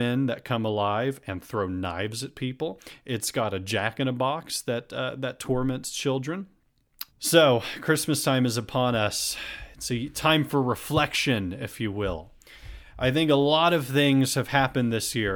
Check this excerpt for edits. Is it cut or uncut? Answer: cut